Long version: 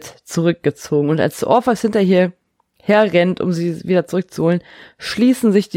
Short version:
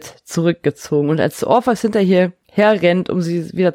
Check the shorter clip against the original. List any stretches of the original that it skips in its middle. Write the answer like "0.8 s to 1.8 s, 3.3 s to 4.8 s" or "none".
2.4 s to 2.7 s